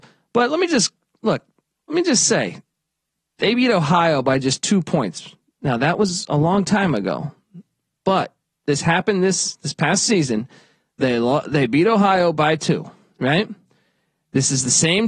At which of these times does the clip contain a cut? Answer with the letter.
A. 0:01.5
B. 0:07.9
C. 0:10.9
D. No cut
D